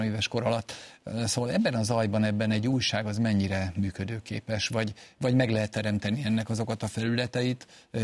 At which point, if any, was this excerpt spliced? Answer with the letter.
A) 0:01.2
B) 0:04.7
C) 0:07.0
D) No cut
D